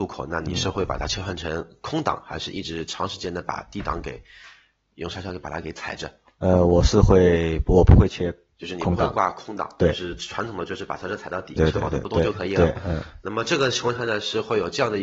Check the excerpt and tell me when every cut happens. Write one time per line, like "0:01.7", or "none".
0:11.6